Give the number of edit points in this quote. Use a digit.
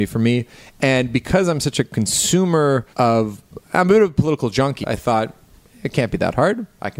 2